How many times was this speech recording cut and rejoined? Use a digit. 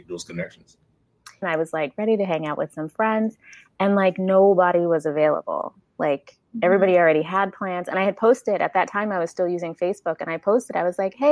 1